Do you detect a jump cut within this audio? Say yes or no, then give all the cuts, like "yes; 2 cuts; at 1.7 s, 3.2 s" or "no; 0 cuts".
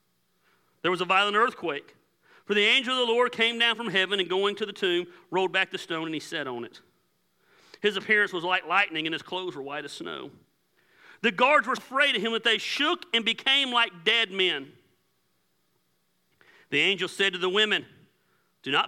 yes; 1 cut; at 11.8 s